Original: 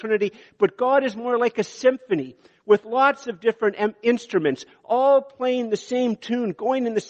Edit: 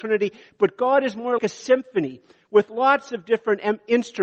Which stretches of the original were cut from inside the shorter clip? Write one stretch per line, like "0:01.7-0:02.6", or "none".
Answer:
0:01.4-0:01.5